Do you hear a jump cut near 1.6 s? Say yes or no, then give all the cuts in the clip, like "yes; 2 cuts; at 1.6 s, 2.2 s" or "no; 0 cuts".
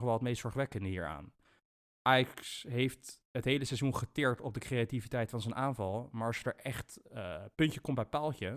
no; 0 cuts